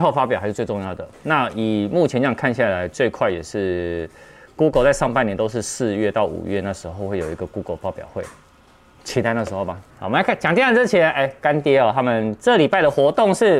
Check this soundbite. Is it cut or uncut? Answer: cut